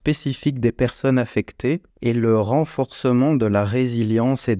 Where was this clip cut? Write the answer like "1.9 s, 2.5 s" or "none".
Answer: 1.9 s